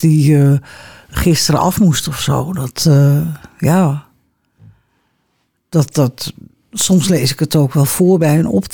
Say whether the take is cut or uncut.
uncut